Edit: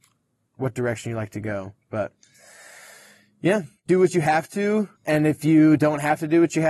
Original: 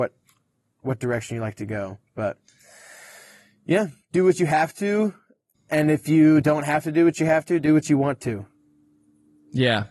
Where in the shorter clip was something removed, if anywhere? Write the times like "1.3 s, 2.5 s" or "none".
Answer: 4.9 s